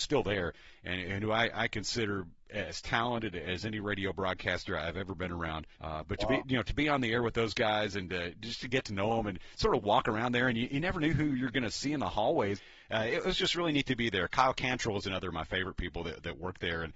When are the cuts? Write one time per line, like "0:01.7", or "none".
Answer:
0:05.7